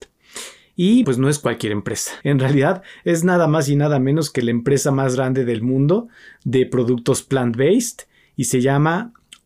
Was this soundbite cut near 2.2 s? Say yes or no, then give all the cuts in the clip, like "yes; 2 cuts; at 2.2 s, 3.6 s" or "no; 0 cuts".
yes; 2 cuts; at 1.0 s, 2.2 s